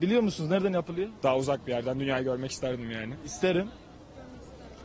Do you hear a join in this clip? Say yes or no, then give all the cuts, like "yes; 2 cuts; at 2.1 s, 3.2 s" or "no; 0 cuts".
yes; 1 cut; at 1.2 s